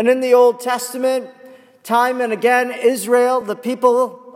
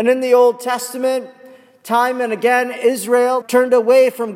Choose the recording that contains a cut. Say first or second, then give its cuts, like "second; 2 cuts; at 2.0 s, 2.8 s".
second; 1 cut; at 3.4 s